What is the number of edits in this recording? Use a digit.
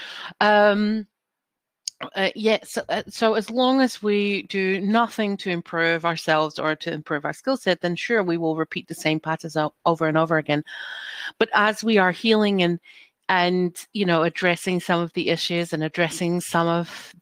0